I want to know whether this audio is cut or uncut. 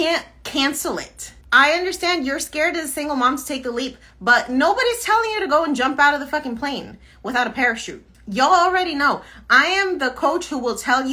cut